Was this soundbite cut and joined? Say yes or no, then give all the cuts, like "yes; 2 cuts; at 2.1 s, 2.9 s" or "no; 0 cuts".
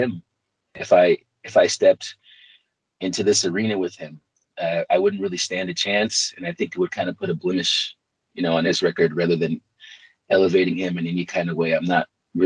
no; 0 cuts